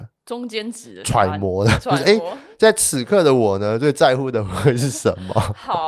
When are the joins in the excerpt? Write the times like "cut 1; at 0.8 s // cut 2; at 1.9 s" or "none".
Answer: none